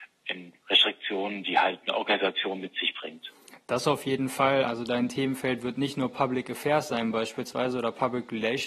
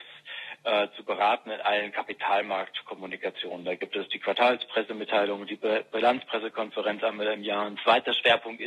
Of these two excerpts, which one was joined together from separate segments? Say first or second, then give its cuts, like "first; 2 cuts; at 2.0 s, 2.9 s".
first; 1 cut; at 4.7 s